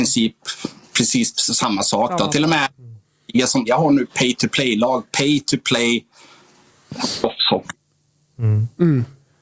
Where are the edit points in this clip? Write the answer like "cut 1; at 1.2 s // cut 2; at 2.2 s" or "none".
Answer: cut 1; at 3.7 s